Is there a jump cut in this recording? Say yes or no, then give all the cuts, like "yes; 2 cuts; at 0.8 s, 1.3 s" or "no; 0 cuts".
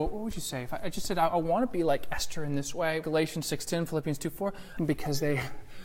yes; 2 cuts; at 3.0 s, 4.8 s